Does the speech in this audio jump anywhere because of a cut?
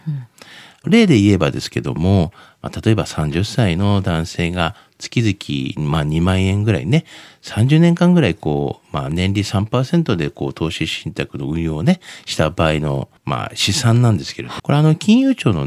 yes; 2 cuts; at 13.2 s, 14.6 s

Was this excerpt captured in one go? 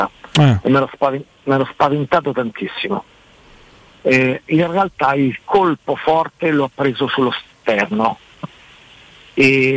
yes; 0 cuts

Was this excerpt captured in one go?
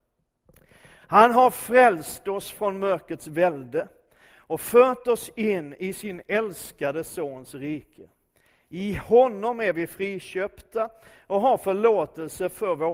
yes; 0 cuts

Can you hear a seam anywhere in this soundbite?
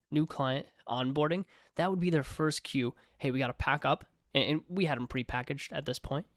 no; 0 cuts

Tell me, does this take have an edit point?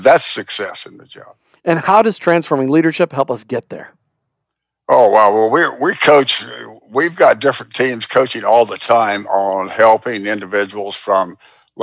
no; 0 cuts

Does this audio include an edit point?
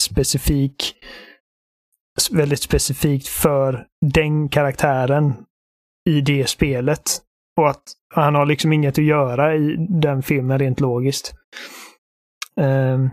no; 0 cuts

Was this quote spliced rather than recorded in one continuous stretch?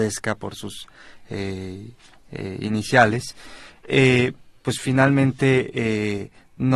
no; 0 cuts

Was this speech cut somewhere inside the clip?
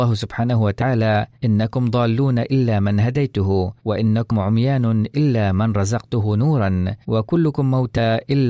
yes; 3 cuts; at 1.3 s, 3.8 s, 7.0 s

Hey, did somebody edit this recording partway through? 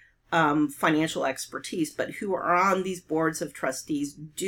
no; 0 cuts

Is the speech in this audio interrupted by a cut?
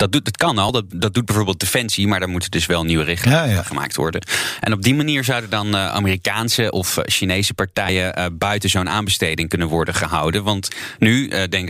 no; 0 cuts

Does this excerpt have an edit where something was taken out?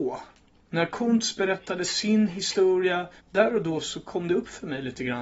yes; 1 cut; at 3.2 s

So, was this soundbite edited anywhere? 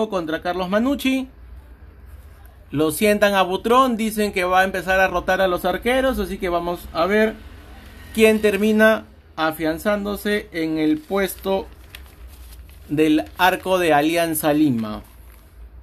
no; 0 cuts

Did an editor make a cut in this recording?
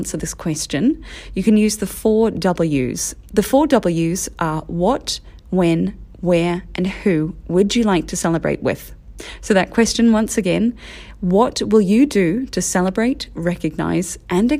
no; 0 cuts

